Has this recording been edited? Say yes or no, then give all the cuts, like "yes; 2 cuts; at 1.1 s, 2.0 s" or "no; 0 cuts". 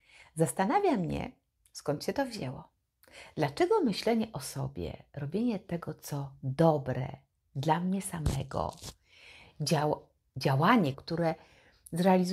yes; 1 cut; at 10.9 s